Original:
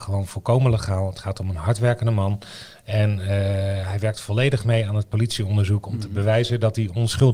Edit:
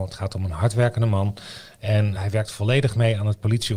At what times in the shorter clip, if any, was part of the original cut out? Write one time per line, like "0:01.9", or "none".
0:02.2